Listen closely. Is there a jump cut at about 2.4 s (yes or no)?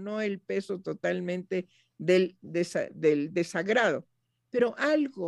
no